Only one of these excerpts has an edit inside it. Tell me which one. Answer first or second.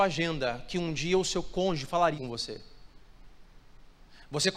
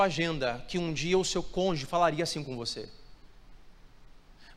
first